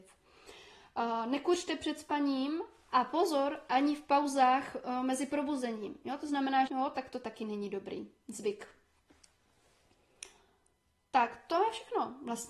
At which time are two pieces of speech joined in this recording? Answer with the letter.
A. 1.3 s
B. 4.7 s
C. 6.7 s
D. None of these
C